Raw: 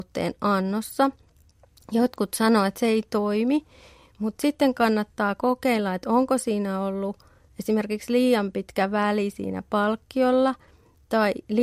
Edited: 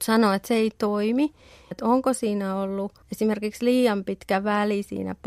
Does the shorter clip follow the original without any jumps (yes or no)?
no